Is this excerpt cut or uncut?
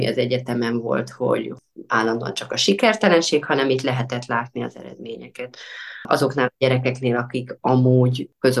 uncut